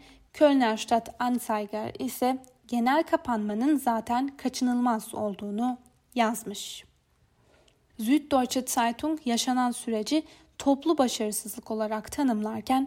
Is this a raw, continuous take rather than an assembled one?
no; 1 cut; at 7.9 s

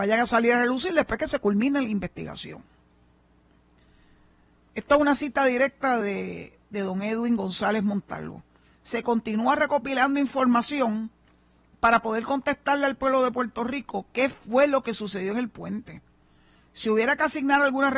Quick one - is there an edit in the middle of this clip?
no; 0 cuts

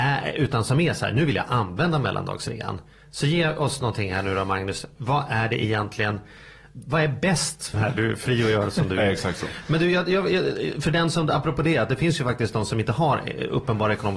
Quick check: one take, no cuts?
no; 1 cut; at 7.7 s

